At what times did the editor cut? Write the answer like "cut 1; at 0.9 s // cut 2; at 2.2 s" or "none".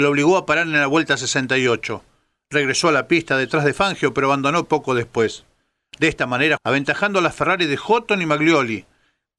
cut 1; at 6.6 s

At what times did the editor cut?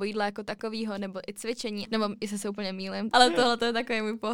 cut 1; at 1.8 s // cut 2; at 3.1 s

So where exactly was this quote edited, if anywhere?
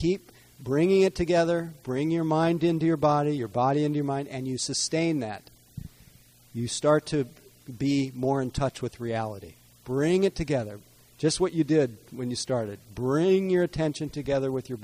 cut 1; at 9.7 s

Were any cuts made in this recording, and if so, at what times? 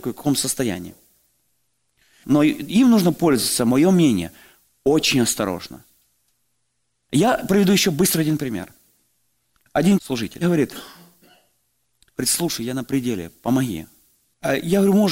cut 1; at 2.2 s

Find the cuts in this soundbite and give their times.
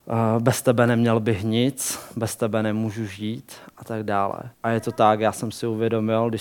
cut 1; at 4.5 s

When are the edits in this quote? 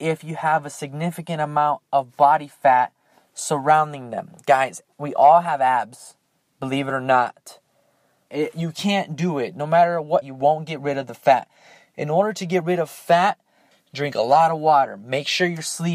cut 1; at 8.3 s // cut 2; at 10.2 s // cut 3; at 13.7 s

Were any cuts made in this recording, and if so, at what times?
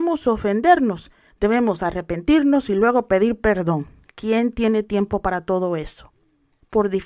cut 1; at 1.3 s

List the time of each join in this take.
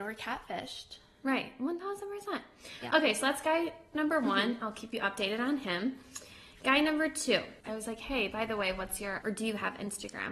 cut 1; at 7.6 s // cut 2; at 9.2 s

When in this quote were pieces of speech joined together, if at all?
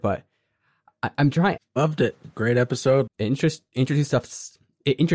cut 1; at 1.6 s // cut 2; at 3.1 s

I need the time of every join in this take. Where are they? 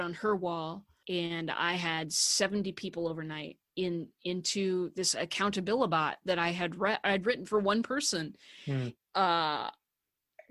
cut 1; at 1.0 s // cut 2; at 3.7 s // cut 3; at 9.0 s

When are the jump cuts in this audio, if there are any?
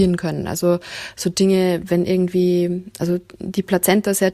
cut 1; at 1.8 s

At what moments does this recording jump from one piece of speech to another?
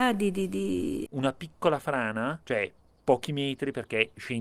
cut 1; at 1.1 s // cut 2; at 2.4 s

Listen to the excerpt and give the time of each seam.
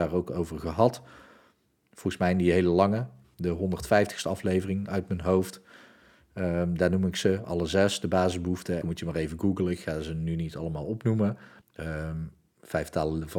cut 1; at 8.8 s // cut 2; at 11.6 s

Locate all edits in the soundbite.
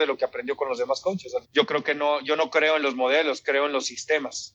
cut 1; at 1.4 s

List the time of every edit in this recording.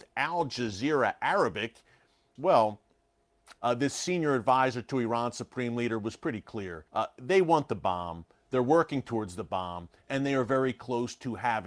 cut 1; at 2.4 s // cut 2; at 3.6 s // cut 3; at 6.9 s

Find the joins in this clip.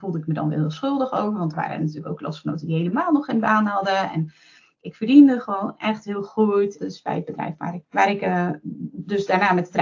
cut 1; at 6.8 s // cut 2; at 7.8 s

